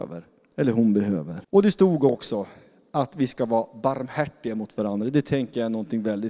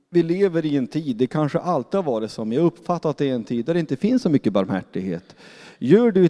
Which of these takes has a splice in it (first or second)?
first